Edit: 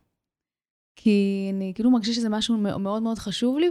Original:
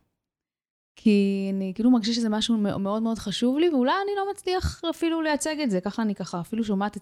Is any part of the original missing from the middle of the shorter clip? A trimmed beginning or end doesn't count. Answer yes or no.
no